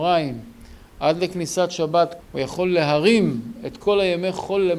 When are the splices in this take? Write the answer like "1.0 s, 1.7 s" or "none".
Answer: 2.2 s